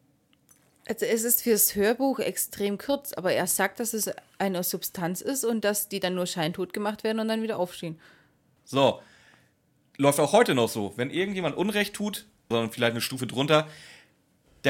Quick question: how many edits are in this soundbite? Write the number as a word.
two